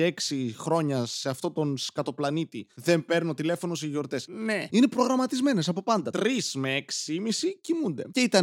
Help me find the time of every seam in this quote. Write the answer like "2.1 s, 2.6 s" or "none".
4.7 s